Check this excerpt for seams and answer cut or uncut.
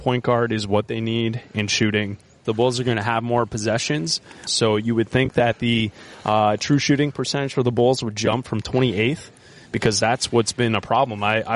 cut